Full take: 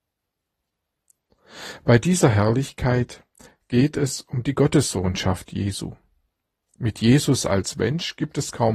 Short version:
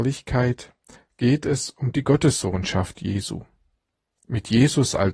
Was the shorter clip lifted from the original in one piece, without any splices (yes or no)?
yes